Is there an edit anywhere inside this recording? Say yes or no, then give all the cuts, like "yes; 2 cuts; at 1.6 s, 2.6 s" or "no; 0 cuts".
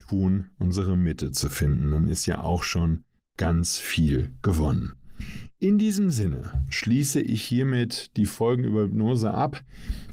no; 0 cuts